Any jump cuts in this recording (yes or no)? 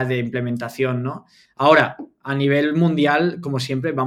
yes